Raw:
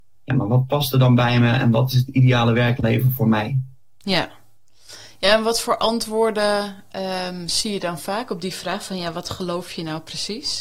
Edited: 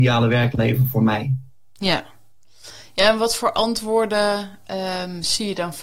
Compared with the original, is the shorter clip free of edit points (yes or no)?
yes